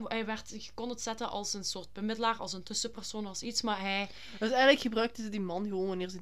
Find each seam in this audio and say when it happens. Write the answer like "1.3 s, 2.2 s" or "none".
none